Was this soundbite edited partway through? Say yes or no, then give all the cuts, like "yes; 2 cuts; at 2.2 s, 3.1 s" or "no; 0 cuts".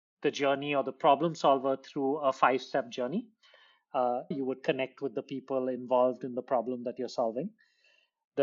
yes; 1 cut; at 4.3 s